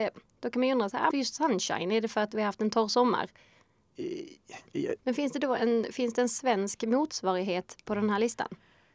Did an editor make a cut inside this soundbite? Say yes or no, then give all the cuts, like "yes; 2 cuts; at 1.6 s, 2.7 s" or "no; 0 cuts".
yes; 2 cuts; at 1.1 s, 5.0 s